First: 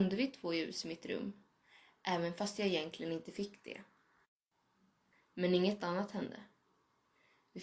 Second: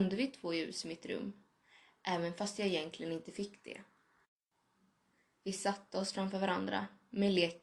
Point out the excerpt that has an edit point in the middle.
first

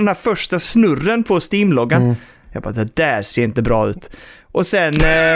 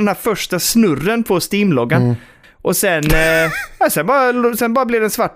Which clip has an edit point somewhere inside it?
second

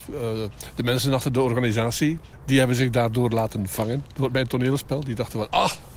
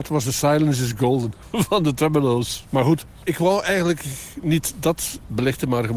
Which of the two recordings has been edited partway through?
second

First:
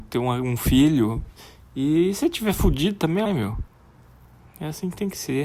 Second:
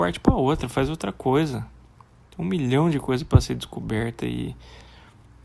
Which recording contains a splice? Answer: first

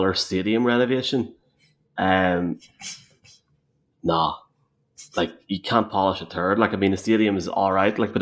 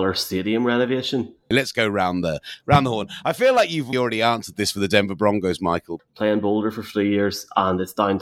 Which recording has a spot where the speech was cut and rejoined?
second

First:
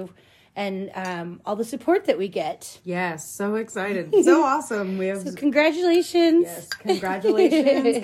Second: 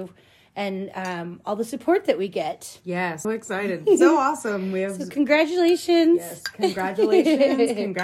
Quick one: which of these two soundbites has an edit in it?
second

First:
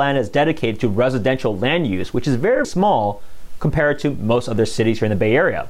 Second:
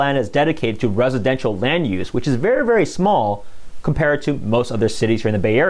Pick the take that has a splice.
first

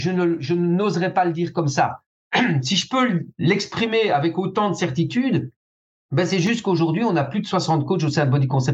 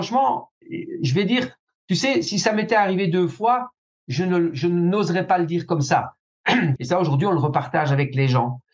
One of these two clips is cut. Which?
second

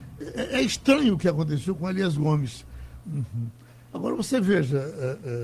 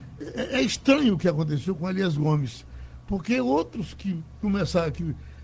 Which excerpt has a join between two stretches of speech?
first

